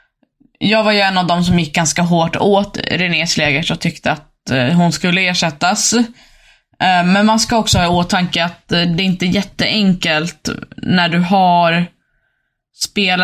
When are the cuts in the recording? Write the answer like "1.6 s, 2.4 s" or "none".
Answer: none